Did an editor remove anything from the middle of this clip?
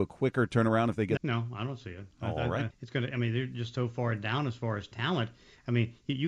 yes; 2 cuts; at 1.2 s, 2.7 s

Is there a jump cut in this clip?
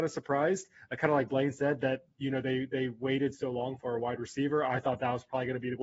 no; 0 cuts

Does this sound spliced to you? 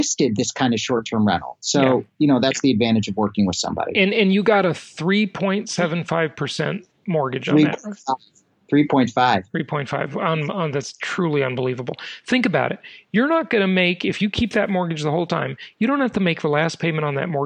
no; 0 cuts

